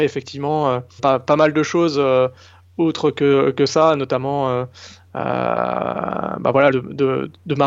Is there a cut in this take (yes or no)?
yes